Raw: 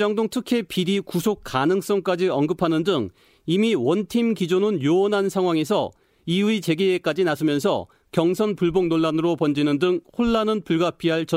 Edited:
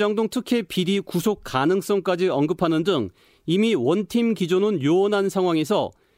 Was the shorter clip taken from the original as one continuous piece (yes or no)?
yes